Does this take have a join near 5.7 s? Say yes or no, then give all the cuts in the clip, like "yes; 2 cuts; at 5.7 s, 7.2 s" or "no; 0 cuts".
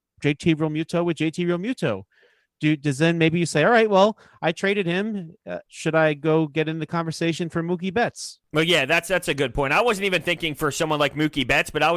yes; 1 cut; at 5.7 s